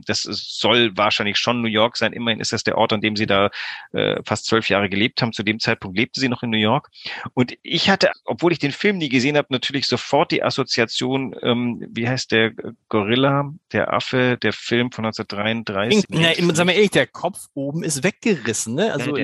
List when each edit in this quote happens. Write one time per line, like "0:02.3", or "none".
0:08.1
0:16.0